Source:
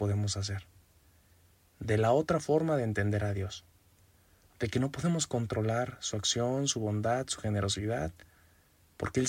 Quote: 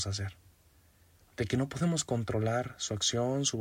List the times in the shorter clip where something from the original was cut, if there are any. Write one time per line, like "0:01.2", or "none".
0:01.2